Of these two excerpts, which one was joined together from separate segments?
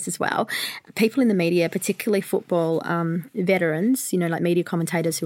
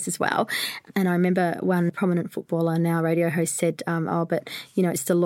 second; 1 cut; at 0.9 s

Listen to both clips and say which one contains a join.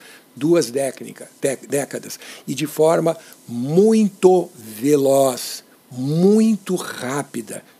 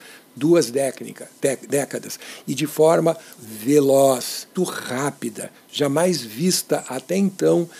second; 2 cuts; at 3.4 s, 4.6 s

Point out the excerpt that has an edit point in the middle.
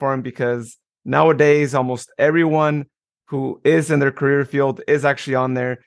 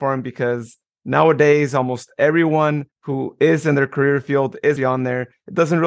second; 2 cuts; at 2.9 s, 4.8 s

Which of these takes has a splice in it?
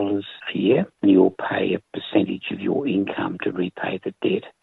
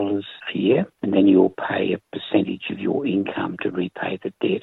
first; 1 cut; at 1.0 s

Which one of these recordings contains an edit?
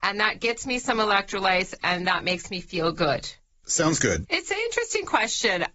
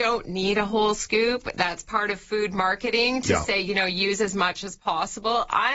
first; 1 cut; at 4.3 s

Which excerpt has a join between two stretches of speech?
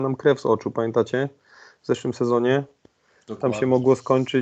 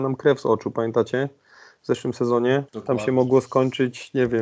second; 1 cut; at 2.7 s

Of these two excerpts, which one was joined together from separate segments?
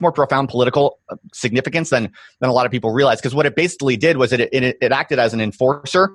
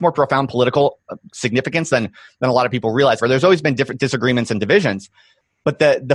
second; 1 cut; at 3.2 s

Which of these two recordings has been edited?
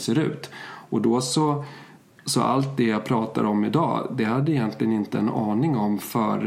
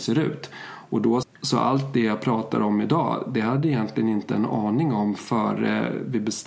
second; 1 cut; at 1.2 s

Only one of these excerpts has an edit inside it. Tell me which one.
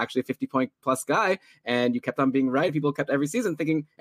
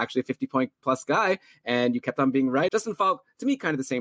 second; 1 cut; at 2.7 s

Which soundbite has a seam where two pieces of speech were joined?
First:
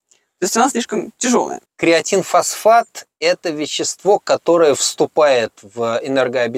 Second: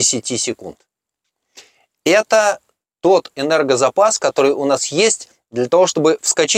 first; 1 cut; at 1.7 s

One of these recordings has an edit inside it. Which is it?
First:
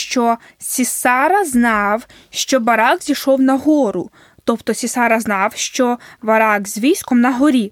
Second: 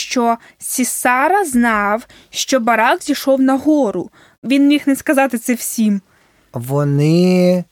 second; 2 cuts; at 4.3 s, 6.4 s

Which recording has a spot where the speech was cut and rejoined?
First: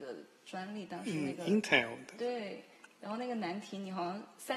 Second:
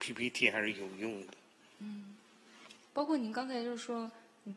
second; 1 cut; at 2.9 s

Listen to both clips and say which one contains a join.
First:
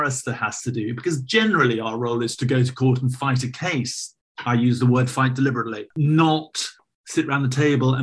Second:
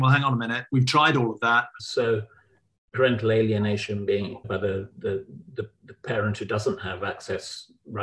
second; 2 cuts; at 1.8 s, 4.4 s

